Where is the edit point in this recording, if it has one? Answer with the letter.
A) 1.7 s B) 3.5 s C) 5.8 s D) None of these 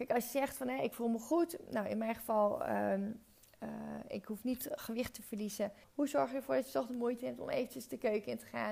C